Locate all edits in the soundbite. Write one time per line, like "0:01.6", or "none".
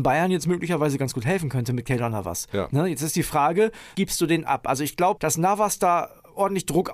0:03.9
0:05.2